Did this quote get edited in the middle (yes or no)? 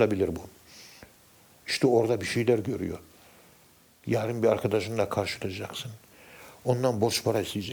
no